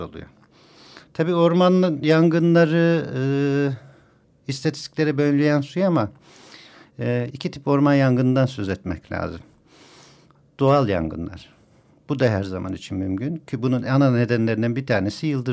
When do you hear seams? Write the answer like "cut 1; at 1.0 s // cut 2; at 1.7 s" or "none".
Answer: none